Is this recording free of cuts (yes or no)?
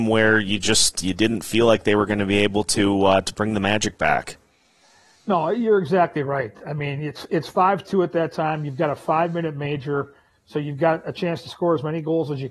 yes